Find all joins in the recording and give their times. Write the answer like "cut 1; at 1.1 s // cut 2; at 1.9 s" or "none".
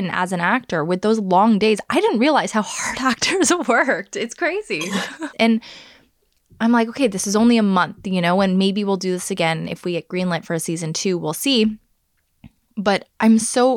cut 1; at 5.3 s